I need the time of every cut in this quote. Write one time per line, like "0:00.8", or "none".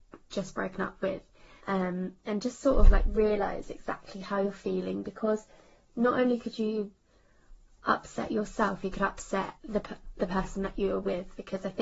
0:01.6
0:09.6